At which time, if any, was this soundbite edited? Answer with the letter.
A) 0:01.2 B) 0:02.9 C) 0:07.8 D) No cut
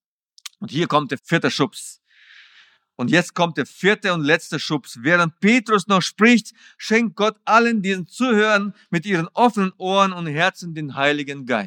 A